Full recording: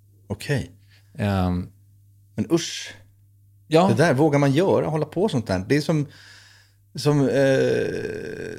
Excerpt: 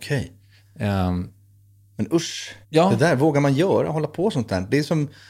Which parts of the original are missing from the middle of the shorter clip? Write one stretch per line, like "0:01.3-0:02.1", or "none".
0:03.0-0:03.6